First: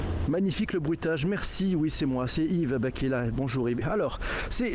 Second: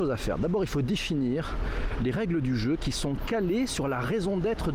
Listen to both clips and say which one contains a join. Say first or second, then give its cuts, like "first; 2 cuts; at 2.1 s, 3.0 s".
first; 1 cut; at 3.8 s